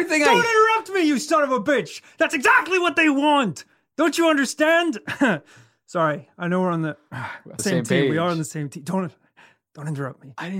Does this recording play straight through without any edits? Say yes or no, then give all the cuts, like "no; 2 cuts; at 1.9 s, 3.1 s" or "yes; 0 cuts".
no; 1 cut; at 7.6 s